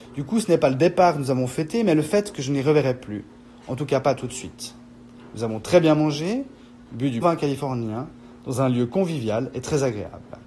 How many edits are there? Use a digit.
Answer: 1